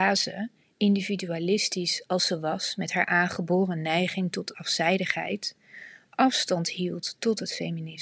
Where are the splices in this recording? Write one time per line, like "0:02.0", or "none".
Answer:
none